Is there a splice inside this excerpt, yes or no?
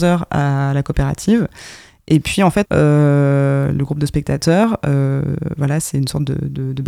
yes